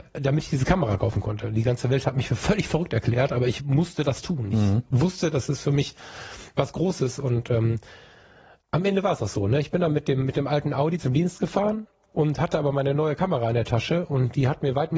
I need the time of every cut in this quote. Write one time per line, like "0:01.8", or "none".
none